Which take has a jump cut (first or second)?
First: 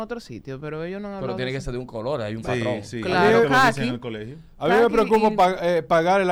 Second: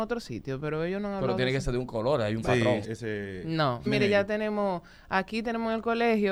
second